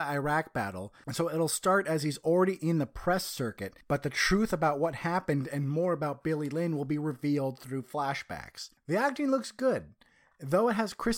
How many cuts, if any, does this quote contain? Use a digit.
1